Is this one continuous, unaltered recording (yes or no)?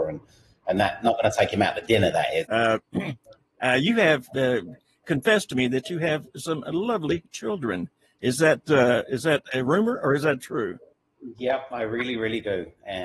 no